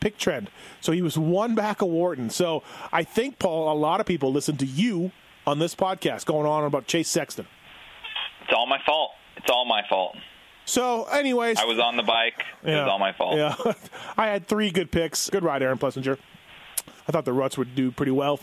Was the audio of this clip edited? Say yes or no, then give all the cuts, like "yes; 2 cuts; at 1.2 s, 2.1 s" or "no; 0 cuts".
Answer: yes; 2 cuts; at 15.3 s, 17.0 s